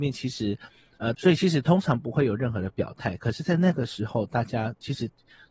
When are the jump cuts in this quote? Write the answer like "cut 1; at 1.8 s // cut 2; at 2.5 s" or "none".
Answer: cut 1; at 1.1 s